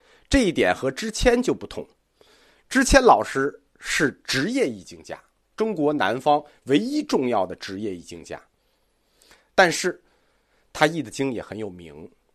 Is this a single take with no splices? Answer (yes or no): no